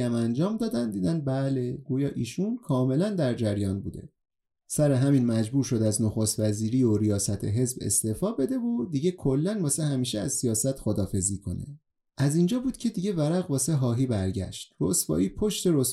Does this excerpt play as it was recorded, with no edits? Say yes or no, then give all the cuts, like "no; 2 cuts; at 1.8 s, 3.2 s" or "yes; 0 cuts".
yes; 0 cuts